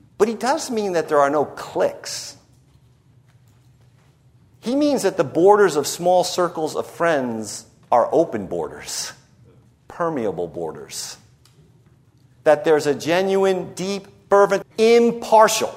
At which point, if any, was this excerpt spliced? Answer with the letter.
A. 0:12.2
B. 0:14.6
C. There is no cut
B